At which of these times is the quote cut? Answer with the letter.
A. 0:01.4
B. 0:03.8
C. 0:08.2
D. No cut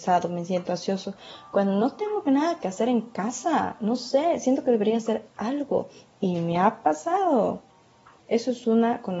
C